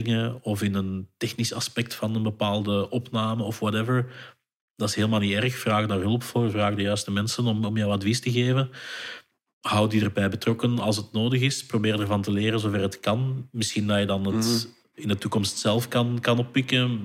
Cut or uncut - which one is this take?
uncut